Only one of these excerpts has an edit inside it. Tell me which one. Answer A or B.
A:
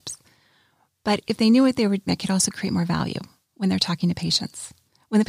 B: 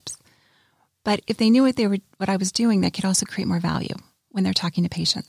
A